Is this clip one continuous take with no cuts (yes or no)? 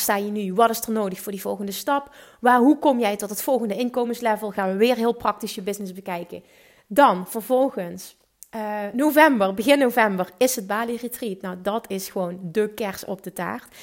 yes